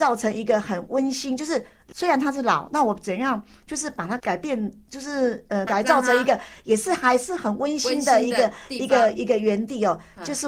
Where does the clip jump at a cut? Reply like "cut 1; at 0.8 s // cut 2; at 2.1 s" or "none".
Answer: cut 1; at 4.2 s // cut 2; at 5.7 s